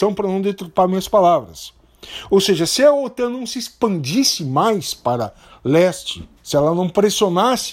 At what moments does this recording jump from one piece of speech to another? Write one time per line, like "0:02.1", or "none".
0:06.4